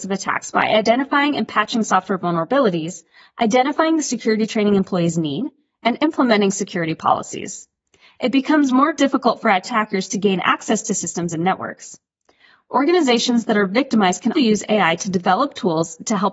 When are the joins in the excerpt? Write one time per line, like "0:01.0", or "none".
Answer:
0:14.3